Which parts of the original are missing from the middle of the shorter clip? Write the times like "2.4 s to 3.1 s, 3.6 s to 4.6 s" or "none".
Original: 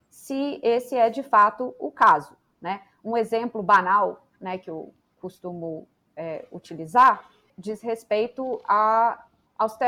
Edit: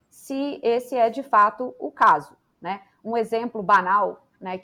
none